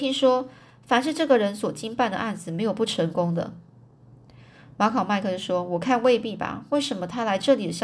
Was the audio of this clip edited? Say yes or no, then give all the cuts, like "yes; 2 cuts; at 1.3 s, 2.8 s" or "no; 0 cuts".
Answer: no; 0 cuts